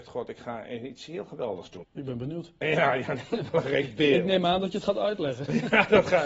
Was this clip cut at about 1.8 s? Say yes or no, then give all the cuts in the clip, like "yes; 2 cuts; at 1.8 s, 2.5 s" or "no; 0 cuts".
yes; 1 cut; at 1.8 s